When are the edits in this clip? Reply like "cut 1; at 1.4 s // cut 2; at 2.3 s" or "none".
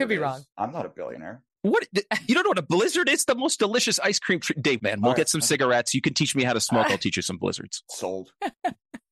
cut 1; at 4.8 s